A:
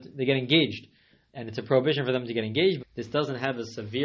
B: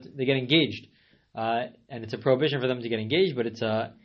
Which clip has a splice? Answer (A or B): A